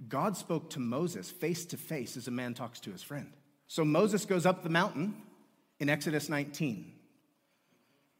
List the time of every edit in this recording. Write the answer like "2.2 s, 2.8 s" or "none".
3.7 s